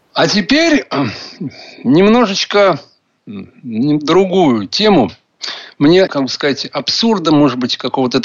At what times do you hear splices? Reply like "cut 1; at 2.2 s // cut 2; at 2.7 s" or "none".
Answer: cut 1; at 6.1 s